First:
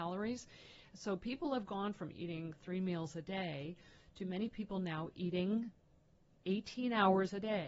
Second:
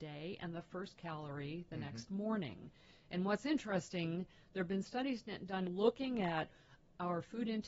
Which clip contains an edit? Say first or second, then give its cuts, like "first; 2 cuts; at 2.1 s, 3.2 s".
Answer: second; 1 cut; at 5.7 s